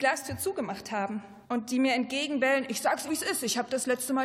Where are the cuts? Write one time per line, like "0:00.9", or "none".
0:01.4
0:03.1